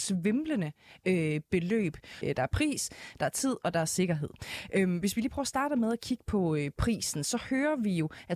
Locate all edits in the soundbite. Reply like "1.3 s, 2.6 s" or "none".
2.2 s